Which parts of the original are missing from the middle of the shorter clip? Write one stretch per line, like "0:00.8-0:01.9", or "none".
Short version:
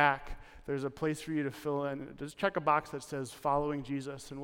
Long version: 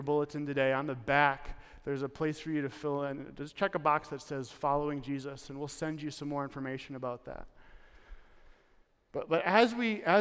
none